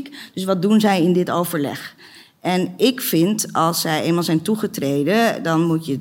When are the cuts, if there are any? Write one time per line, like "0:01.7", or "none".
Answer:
none